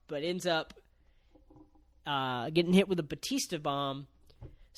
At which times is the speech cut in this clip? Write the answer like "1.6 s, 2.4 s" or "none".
none